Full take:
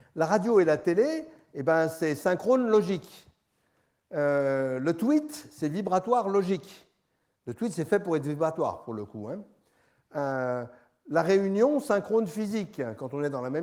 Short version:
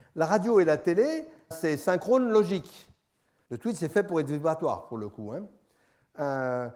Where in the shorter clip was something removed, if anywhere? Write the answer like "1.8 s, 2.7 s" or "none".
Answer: 1.5 s, 3.5 s